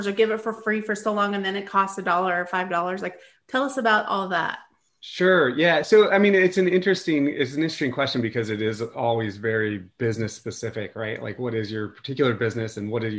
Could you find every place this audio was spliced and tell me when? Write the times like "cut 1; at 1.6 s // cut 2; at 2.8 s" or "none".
none

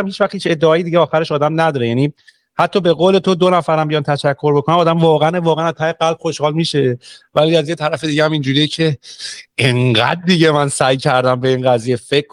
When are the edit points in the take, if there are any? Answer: none

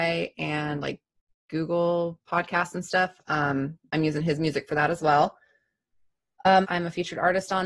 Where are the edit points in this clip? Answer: cut 1; at 6.6 s

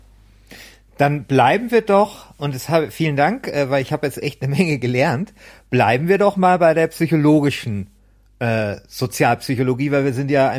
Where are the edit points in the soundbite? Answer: none

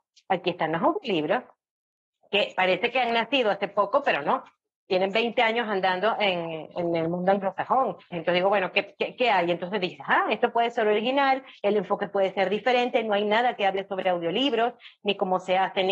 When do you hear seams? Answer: cut 1; at 8.1 s

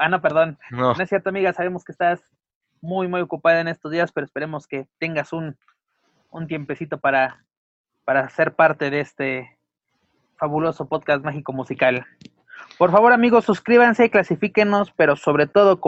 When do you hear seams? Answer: cut 1; at 1.0 s

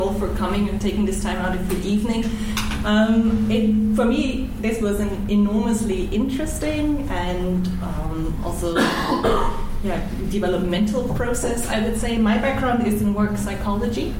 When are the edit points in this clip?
none

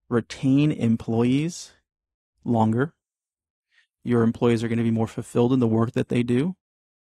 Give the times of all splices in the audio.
none

